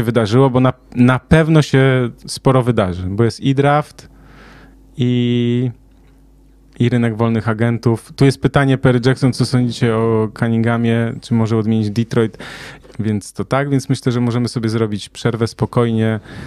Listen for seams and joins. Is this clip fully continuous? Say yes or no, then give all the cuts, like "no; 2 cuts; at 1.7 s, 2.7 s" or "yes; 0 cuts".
no; 1 cut; at 12.8 s